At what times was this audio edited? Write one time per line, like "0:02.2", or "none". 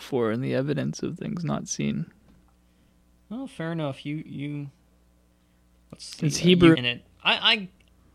0:06.7